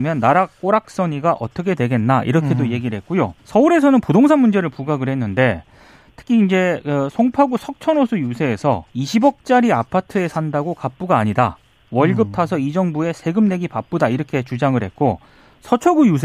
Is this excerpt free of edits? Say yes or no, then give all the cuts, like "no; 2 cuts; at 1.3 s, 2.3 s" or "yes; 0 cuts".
no; 2 cuts; at 3.4 s, 8.9 s